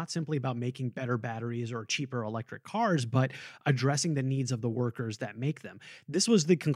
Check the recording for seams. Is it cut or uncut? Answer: uncut